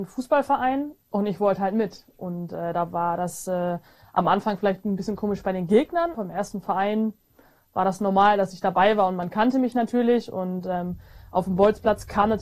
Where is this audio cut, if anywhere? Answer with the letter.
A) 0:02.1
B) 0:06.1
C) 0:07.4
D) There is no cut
B